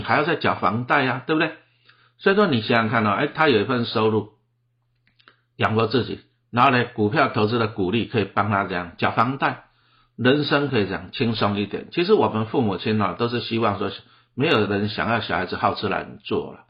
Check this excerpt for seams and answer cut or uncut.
uncut